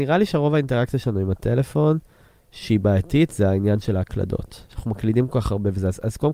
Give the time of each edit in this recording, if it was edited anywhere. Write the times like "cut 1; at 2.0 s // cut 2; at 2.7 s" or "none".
cut 1; at 4.7 s